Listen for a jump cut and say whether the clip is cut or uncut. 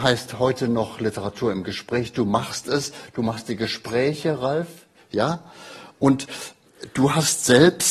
uncut